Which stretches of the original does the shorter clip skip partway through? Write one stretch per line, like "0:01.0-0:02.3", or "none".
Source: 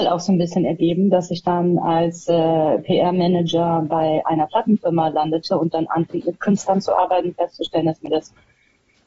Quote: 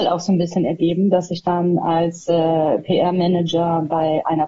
none

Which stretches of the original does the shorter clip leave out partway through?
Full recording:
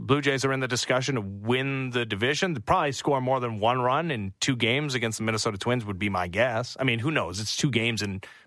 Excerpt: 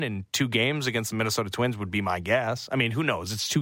none

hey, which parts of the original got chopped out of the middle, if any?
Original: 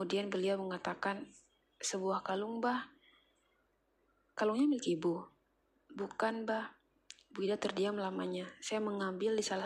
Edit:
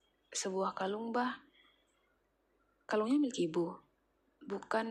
none

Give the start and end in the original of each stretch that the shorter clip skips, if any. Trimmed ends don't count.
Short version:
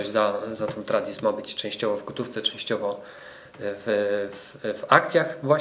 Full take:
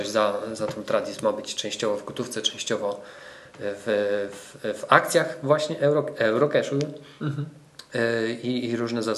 none

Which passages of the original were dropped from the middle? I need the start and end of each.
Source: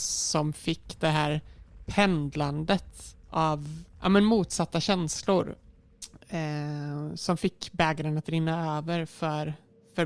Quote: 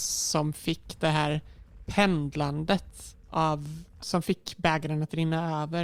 0:04.0-0:07.2

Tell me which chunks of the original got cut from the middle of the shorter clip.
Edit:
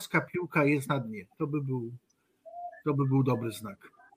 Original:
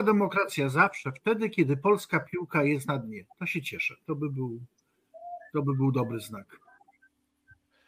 0:03.3-0:04.0

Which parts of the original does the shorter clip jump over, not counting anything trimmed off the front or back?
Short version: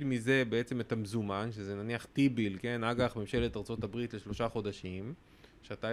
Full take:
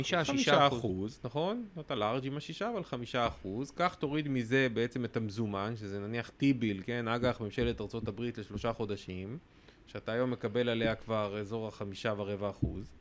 none

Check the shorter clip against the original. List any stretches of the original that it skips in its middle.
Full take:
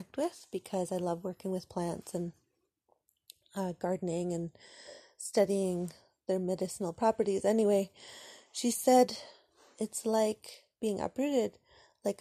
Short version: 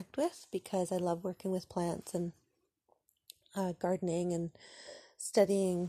none

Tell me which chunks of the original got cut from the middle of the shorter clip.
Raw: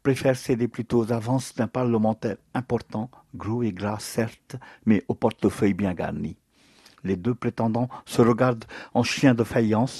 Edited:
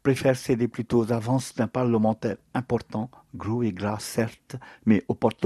none

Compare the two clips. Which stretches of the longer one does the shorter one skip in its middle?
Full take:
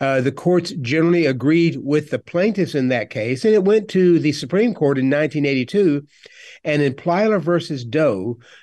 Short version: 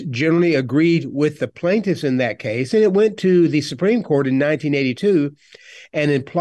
none

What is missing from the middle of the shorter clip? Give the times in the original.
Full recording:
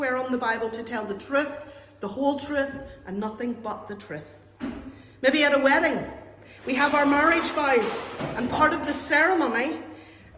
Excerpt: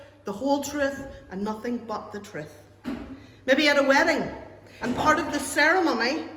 0:06.6-0:08.3

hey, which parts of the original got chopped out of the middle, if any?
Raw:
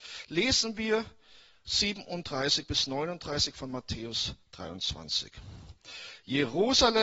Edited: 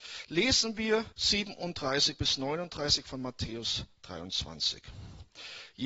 0:01.1-0:01.6

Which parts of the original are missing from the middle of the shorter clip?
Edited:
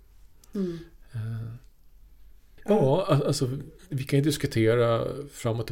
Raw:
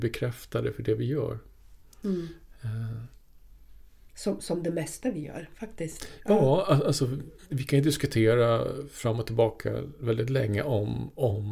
0:04.1-0:06.2

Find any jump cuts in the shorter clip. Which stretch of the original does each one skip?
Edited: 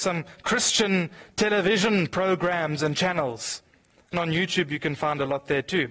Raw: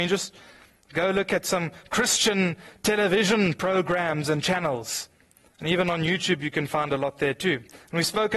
0:05.6-0:05.8

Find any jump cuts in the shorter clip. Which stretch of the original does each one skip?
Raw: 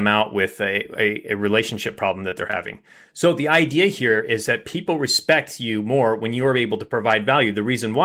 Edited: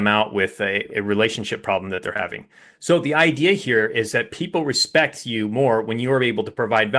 0:00.9-0:01.3

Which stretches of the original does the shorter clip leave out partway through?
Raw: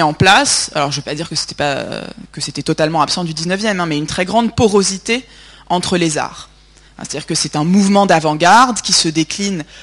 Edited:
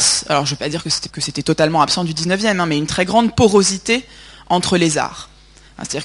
0:01.5-0:02.3

